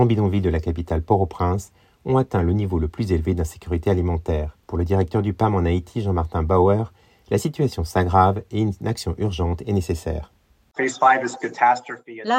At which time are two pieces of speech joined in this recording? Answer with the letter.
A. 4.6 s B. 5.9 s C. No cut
A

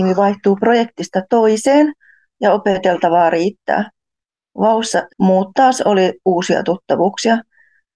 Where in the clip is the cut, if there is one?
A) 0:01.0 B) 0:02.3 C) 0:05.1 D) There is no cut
C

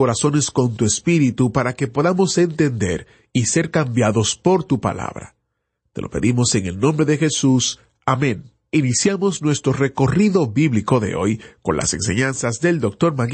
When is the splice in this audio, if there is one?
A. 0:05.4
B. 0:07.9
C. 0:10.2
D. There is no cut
D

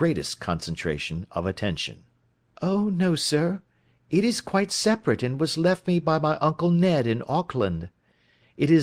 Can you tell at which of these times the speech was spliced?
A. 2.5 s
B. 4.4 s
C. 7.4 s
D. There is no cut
A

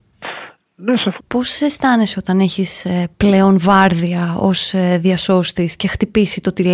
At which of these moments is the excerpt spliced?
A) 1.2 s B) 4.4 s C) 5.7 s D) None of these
A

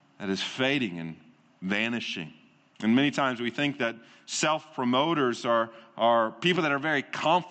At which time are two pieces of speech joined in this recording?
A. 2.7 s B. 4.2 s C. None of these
A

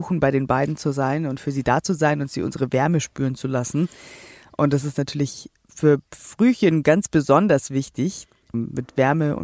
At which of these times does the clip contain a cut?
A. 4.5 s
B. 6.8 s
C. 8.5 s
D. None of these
C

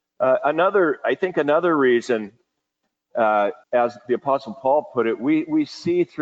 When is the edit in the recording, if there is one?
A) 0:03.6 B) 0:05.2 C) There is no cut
A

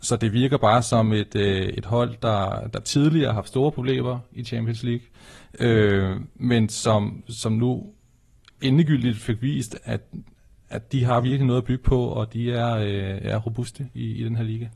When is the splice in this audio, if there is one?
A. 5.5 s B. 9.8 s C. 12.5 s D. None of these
B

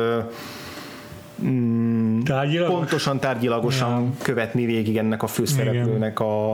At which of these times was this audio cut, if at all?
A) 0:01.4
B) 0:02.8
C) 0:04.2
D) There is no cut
D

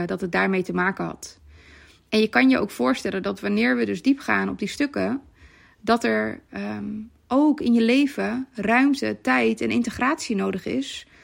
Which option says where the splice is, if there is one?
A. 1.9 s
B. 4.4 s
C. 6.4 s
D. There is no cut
D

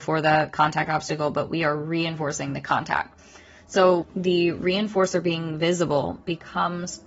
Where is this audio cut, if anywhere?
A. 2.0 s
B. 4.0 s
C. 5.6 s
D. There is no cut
B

